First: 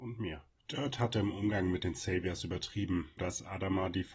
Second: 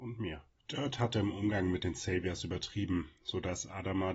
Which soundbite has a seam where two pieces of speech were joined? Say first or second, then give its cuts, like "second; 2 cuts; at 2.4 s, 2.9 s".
first; 1 cut; at 3.2 s